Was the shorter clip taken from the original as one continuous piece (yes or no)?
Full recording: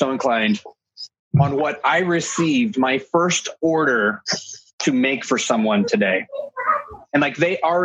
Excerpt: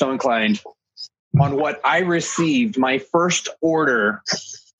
yes